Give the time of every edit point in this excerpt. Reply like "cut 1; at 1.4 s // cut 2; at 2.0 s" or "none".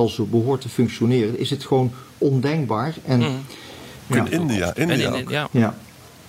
cut 1; at 4.1 s

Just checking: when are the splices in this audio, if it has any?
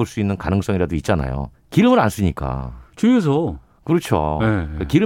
cut 1; at 1.5 s

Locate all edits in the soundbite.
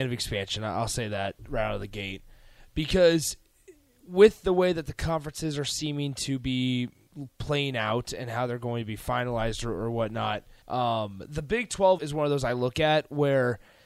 cut 1; at 10.6 s // cut 2; at 12.0 s

